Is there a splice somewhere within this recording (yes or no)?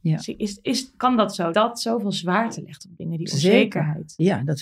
yes